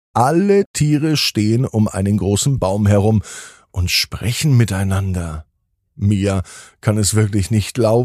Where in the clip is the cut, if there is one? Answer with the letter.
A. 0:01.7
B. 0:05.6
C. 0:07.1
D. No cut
D